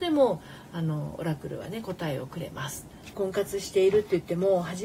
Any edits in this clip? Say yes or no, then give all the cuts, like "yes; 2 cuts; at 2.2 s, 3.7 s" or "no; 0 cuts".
yes; 1 cut; at 3.1 s